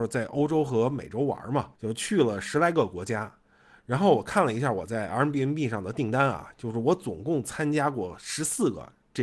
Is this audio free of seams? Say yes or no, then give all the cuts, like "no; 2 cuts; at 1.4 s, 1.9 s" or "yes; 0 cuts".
no; 1 cut; at 1.7 s